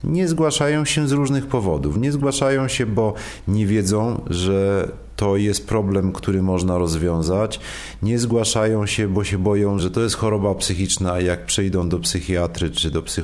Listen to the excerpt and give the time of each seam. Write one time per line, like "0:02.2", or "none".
0:09.8